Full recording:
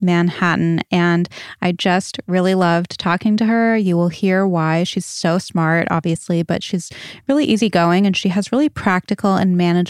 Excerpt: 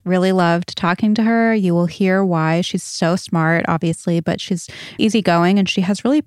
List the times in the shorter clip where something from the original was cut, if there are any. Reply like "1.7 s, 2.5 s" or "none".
5.0 s